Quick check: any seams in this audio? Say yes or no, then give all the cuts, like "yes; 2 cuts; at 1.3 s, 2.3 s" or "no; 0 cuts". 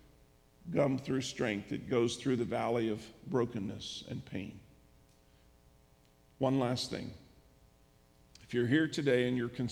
no; 0 cuts